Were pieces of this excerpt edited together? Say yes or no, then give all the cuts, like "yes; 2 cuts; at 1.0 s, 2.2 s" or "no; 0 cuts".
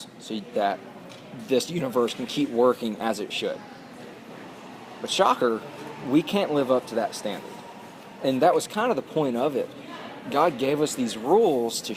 no; 0 cuts